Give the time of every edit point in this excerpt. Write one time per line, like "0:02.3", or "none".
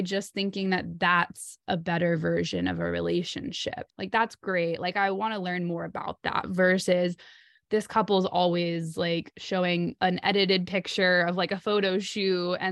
0:03.9